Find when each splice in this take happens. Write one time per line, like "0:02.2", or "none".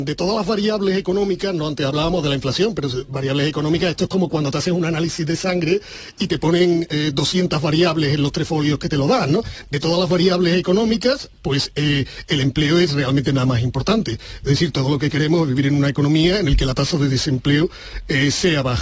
none